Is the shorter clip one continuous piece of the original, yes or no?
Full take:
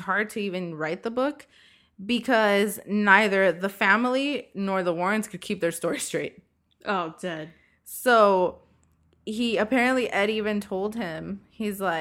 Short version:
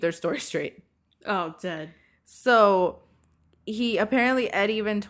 yes